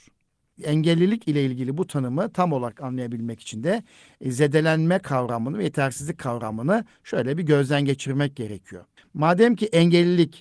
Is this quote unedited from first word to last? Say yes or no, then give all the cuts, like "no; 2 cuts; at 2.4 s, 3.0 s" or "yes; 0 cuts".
yes; 0 cuts